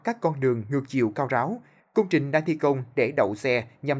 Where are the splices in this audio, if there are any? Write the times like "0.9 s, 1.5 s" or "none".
none